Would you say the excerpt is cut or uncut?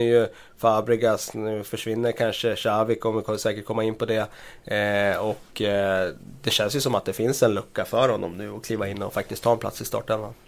uncut